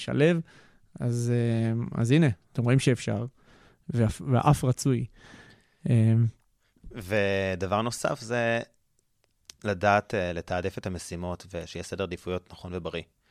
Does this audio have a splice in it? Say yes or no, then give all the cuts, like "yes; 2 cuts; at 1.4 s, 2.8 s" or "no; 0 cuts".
yes; 1 cut; at 2.5 s